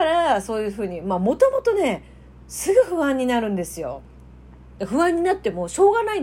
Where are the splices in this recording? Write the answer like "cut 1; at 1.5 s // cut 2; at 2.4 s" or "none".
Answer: cut 1; at 4.8 s